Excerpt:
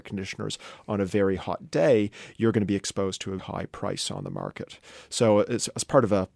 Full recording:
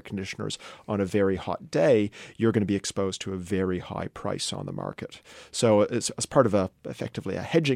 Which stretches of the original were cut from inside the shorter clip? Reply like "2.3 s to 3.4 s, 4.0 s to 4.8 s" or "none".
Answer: 3.4 s to 3.8 s